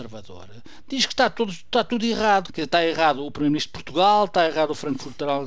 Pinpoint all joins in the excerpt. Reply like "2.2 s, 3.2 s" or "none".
2.5 s